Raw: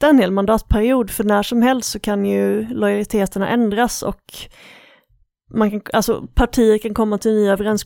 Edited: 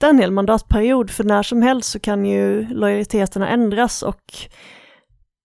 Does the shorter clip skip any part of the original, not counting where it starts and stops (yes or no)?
no